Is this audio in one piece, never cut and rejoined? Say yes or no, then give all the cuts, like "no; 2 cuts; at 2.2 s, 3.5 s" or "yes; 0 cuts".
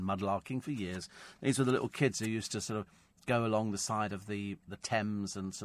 yes; 0 cuts